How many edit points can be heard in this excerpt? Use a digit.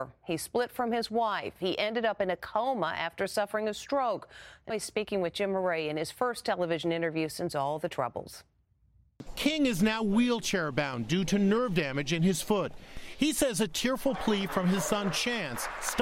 2